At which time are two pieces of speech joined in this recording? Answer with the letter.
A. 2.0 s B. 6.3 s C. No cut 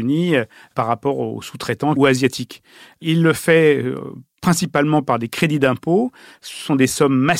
A